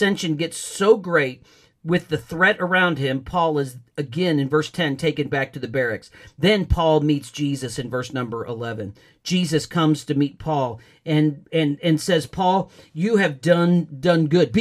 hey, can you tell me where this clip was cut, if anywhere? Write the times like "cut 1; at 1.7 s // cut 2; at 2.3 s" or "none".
none